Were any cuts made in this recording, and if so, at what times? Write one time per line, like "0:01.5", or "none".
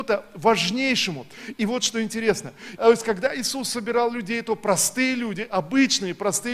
0:02.8